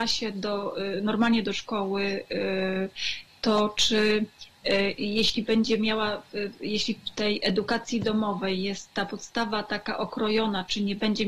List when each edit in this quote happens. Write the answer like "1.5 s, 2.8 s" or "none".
none